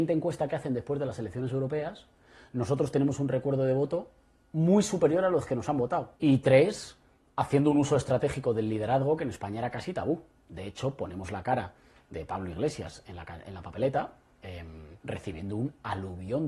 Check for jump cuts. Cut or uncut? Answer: cut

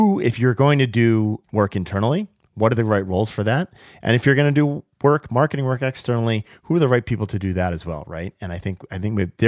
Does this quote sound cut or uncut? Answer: uncut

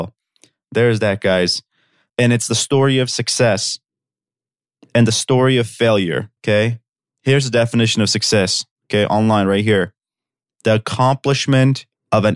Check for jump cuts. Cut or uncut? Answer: cut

